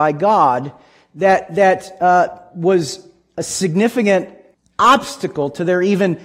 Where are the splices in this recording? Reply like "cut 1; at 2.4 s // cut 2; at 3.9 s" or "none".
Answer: none

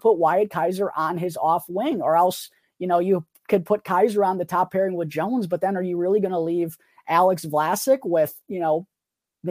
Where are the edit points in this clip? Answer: none

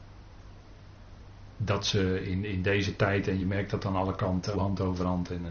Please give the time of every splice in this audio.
cut 1; at 3.4 s // cut 2; at 4.5 s

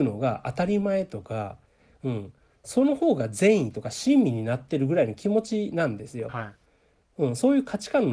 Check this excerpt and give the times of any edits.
none

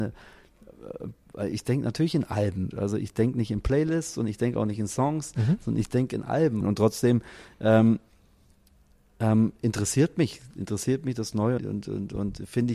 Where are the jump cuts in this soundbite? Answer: cut 1; at 2.7 s // cut 2; at 6.6 s // cut 3; at 11.6 s

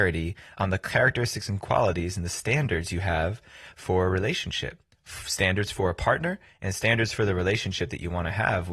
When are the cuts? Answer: none

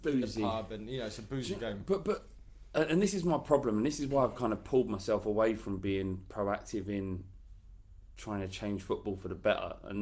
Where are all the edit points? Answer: none

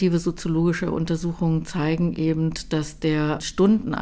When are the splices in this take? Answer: none

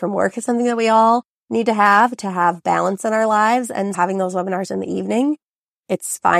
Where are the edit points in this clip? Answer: cut 1; at 3.9 s

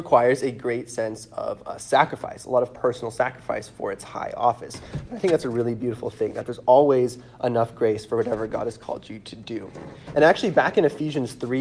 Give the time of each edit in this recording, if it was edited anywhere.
cut 1; at 5.1 s // cut 2; at 10.1 s

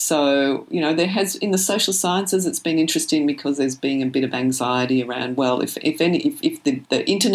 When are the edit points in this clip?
none

